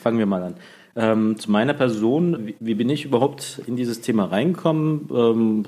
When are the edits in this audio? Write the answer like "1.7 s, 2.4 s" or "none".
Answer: 2.4 s